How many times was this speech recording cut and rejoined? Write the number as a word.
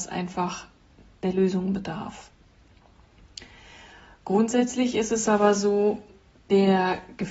zero